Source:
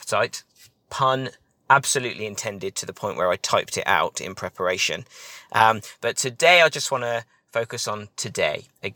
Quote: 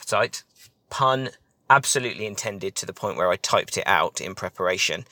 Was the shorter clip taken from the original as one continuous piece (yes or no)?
yes